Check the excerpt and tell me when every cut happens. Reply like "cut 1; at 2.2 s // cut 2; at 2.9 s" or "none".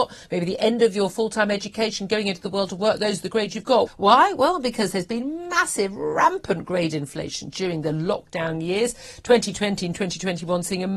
cut 1; at 3.9 s